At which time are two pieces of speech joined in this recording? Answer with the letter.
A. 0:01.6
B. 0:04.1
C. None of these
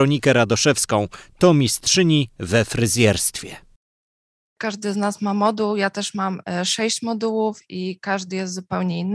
C